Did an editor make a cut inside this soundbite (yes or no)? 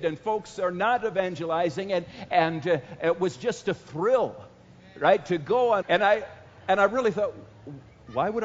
yes